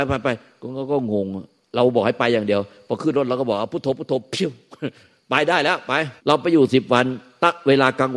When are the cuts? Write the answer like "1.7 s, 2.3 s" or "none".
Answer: 6.2 s